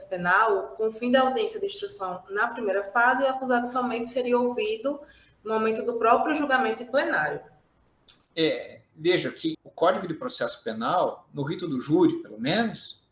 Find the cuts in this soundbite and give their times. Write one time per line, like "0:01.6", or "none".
0:08.2
0:09.5